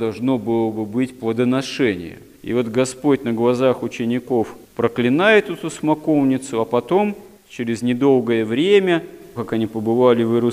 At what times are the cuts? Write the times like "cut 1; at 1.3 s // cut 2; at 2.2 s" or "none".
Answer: cut 1; at 2.3 s // cut 2; at 9.4 s